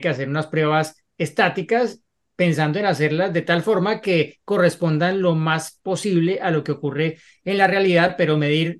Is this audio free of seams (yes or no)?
no